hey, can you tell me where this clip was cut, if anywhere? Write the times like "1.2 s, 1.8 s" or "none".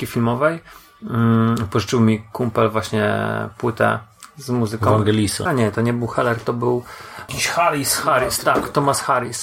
5.5 s